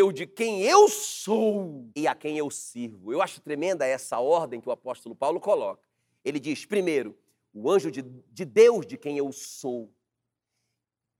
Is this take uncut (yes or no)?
no